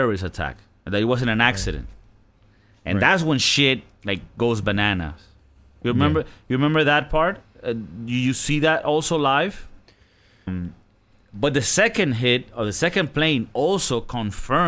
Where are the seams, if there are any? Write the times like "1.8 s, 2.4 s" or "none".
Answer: 10.5 s